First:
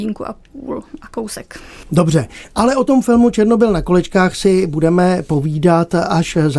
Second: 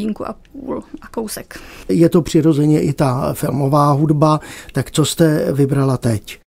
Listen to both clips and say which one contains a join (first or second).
second